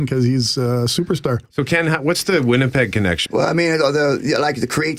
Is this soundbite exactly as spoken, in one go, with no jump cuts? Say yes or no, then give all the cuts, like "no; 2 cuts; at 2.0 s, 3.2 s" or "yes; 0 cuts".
no; 2 cuts; at 1.5 s, 3.3 s